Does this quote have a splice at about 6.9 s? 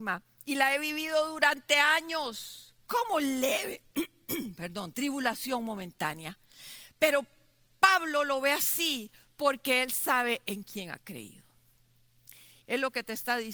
no; 1 cut; at 12.6 s

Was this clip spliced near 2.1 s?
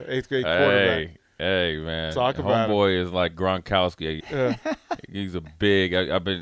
no; 1 cut; at 4.2 s

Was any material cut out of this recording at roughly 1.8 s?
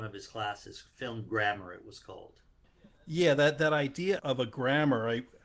no; 1 cut; at 4.2 s

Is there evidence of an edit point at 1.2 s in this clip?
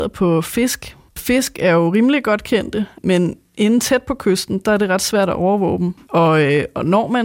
yes; 2 cuts; at 1.2 s, 6.0 s

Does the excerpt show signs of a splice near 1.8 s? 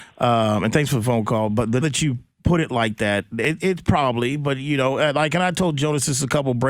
yes; 1 cut; at 1.8 s

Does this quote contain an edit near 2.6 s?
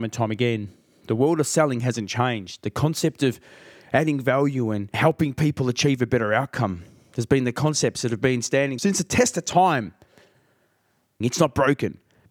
no; 1 cut; at 11.2 s

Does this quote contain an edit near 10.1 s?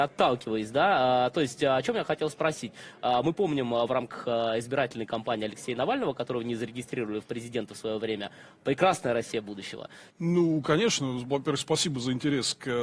yes; 1 cut; at 10.1 s

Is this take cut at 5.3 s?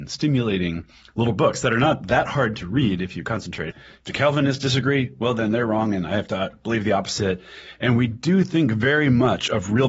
no; 1 cut; at 3.7 s

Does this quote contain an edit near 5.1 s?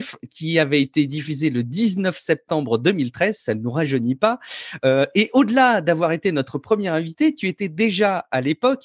no; 0 cuts

